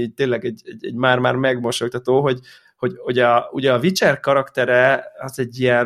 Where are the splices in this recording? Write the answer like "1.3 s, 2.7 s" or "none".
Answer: none